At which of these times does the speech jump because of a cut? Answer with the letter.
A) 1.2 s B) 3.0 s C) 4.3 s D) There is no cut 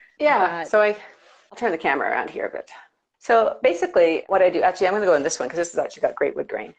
D